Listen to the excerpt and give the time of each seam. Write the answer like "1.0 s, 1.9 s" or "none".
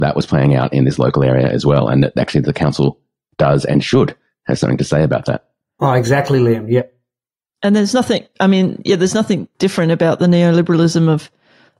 none